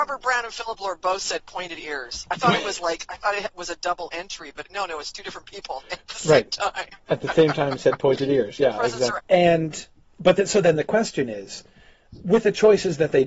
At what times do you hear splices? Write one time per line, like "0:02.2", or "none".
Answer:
0:09.2